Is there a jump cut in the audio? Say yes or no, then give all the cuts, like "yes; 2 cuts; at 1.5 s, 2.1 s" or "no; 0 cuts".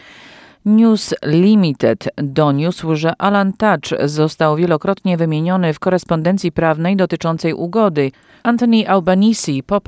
yes; 1 cut; at 8.4 s